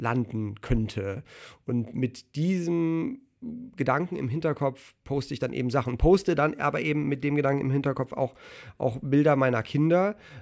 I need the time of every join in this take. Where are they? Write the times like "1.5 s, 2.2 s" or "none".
none